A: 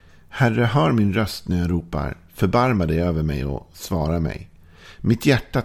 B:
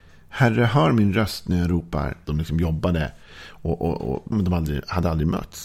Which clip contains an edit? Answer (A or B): B